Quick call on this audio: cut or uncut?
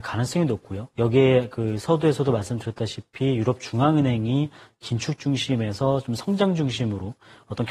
cut